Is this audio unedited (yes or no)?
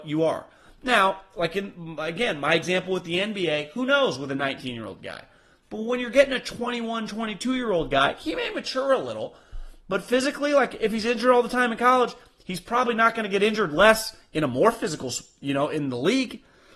yes